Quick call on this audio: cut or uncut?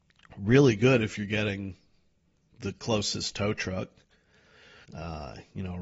cut